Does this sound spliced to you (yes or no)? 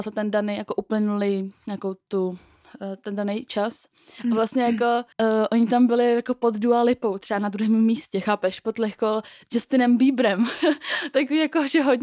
yes